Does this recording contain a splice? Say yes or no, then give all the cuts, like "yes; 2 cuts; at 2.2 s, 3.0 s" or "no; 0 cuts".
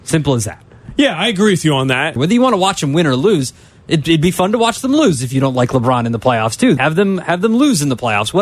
yes; 2 cuts; at 2.2 s, 6.8 s